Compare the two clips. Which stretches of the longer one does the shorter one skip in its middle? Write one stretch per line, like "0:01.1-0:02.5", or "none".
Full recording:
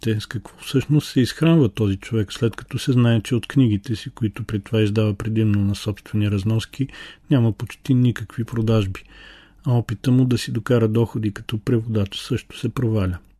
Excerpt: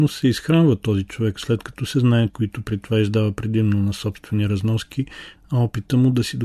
0:03.2-0:04.1
0:07.2-0:09.5